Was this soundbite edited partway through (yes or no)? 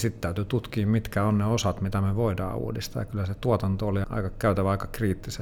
yes